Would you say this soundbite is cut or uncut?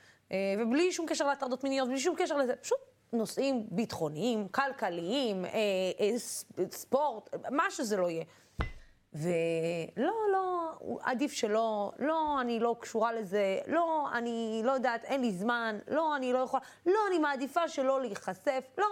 uncut